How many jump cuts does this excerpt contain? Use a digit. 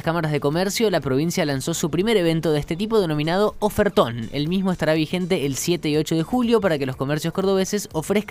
0